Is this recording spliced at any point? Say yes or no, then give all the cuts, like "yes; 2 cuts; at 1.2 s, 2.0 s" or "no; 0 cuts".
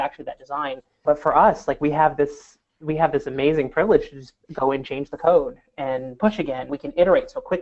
yes; 2 cuts; at 1.0 s, 6.7 s